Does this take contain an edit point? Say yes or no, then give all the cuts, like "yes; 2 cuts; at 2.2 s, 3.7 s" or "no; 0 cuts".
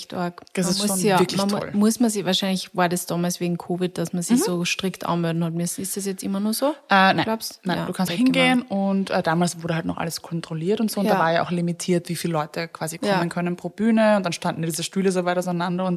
yes; 1 cut; at 8.1 s